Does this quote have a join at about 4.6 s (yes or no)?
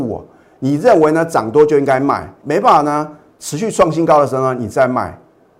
no